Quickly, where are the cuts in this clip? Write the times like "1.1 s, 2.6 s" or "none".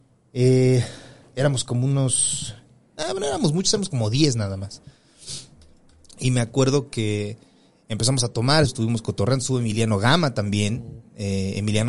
8.7 s